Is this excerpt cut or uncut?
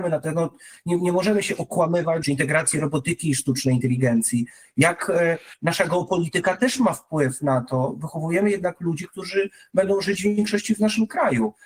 cut